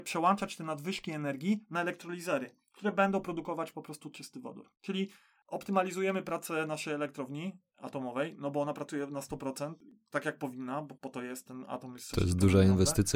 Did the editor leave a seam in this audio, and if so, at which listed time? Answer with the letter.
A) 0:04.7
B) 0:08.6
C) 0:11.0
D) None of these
C